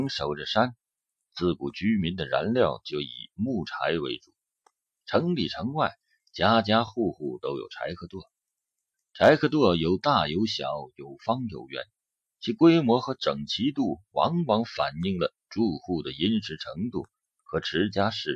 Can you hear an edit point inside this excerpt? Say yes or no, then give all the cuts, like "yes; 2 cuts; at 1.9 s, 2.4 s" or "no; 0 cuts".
no; 0 cuts